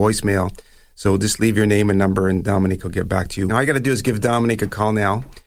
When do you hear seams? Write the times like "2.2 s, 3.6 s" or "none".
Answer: 3.5 s